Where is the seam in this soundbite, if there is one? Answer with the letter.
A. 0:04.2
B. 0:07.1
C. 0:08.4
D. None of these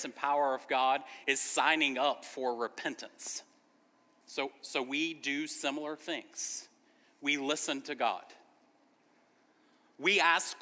A